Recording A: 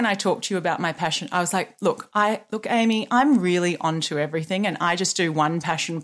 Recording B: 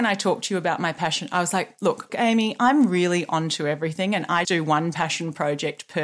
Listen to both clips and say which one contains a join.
B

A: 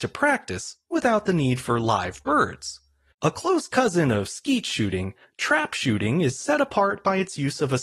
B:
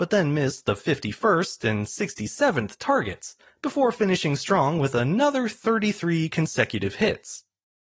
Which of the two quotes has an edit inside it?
A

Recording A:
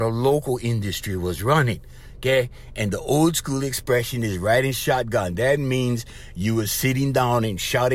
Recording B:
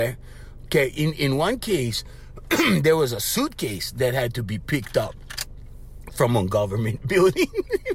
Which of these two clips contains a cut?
A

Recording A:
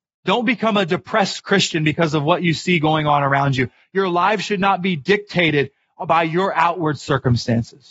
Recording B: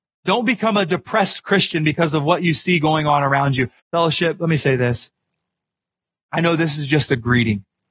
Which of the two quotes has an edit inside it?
B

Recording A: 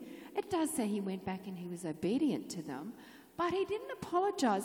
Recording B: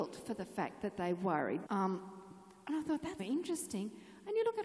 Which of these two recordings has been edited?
B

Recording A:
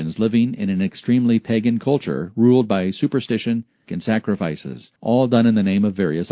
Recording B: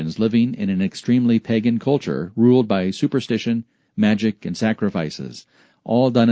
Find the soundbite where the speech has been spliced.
A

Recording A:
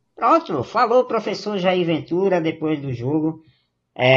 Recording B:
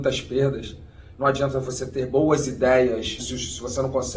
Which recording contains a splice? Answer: B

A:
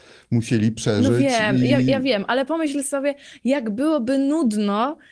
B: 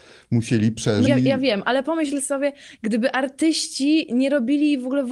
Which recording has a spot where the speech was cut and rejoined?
B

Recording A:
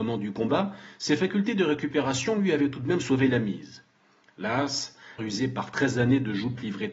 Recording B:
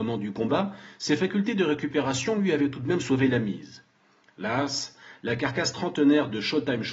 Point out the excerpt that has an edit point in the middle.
A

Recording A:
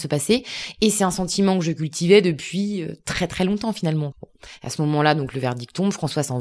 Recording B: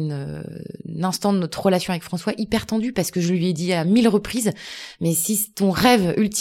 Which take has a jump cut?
A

